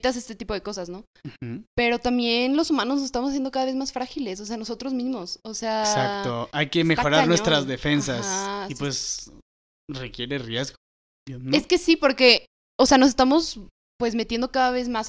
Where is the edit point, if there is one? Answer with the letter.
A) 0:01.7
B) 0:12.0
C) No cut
A